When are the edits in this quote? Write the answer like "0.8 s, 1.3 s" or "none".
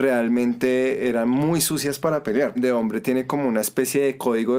2.6 s